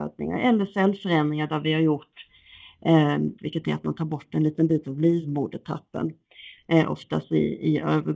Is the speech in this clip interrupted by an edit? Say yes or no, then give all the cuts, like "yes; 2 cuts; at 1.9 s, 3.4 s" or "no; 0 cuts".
yes; 2 cuts; at 3.4 s, 6.6 s